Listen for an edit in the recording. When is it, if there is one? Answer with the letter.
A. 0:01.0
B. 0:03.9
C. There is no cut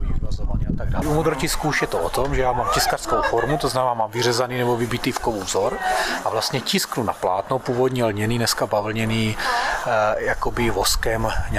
A